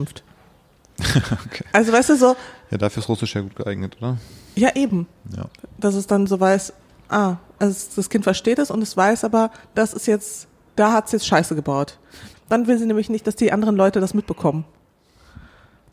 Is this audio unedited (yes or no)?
no